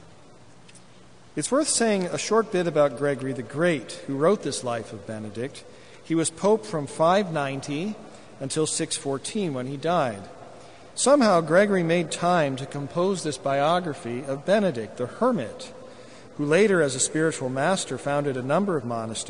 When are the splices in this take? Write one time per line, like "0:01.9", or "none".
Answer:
0:10.9